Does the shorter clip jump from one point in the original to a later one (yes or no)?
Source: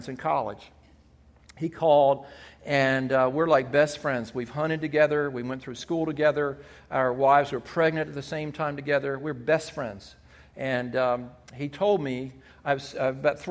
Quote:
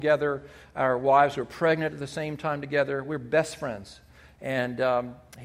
no